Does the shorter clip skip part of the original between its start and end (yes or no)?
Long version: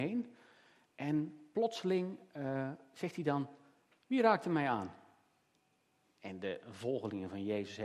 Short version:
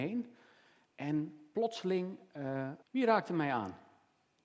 yes